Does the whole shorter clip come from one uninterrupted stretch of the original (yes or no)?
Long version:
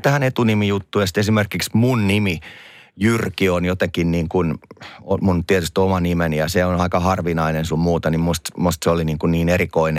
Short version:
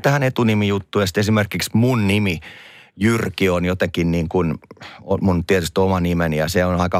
yes